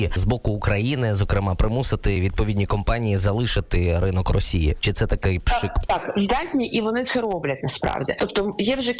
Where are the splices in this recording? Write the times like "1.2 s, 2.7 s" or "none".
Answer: 5.8 s